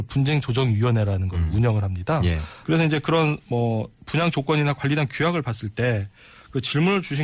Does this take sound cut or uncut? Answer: cut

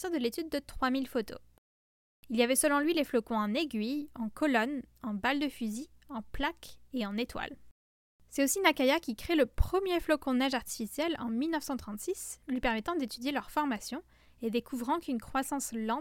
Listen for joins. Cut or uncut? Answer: uncut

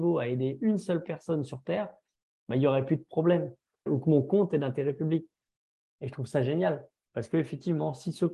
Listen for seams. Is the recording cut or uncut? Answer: cut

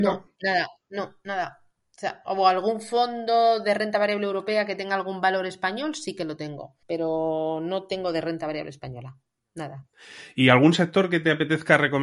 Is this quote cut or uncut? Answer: cut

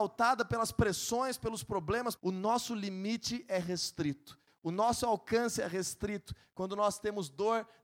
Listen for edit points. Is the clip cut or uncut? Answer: cut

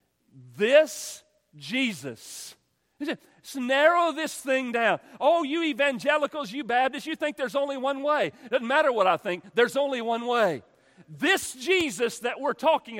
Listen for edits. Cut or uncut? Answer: uncut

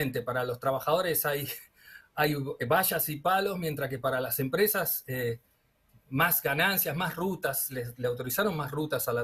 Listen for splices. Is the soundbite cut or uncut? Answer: uncut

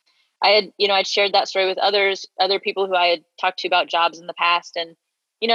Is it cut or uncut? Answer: uncut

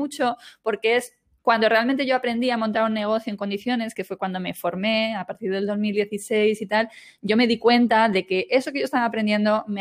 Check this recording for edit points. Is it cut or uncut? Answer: uncut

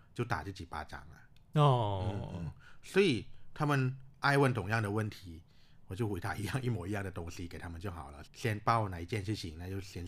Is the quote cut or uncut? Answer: cut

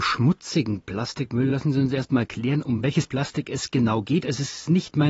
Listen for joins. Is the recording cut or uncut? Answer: uncut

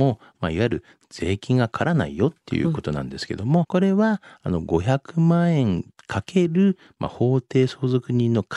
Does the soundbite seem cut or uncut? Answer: cut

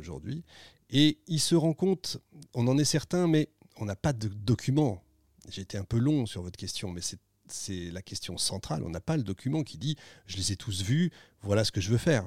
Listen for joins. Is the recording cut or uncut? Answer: uncut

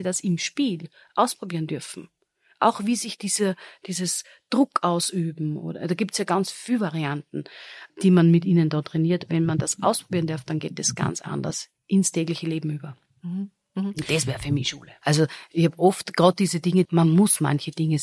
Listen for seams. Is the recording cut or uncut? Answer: cut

